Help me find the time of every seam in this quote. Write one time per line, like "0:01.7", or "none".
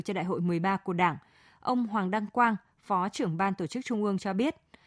none